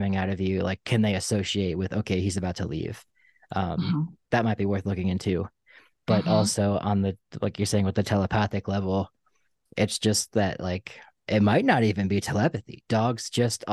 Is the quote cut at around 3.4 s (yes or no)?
no